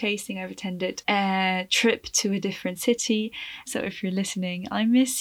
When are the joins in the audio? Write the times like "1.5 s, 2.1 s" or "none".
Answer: 1.0 s, 3.7 s